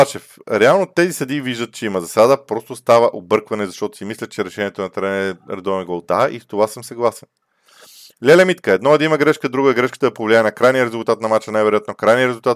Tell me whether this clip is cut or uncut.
uncut